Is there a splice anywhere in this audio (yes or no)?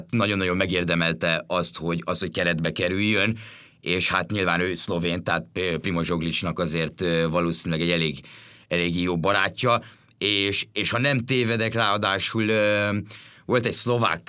no